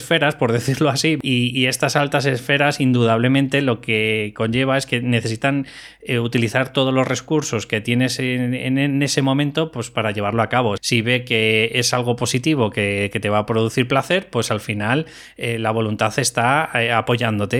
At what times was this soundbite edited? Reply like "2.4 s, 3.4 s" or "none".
10.8 s